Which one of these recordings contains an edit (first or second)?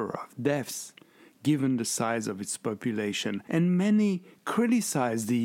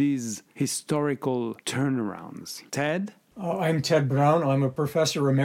second